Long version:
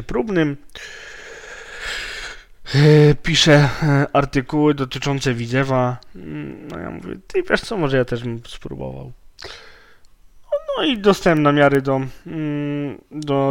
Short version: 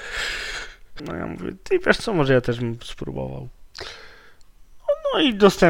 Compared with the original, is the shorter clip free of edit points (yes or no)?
no